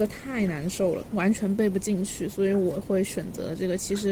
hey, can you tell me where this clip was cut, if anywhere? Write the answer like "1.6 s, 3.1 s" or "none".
none